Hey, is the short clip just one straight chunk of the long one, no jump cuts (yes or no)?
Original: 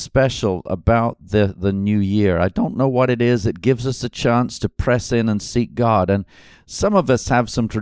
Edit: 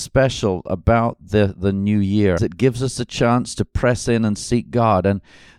no